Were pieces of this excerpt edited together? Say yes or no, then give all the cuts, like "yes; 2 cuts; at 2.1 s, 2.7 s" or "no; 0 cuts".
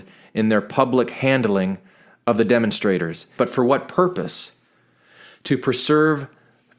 yes; 1 cut; at 3.4 s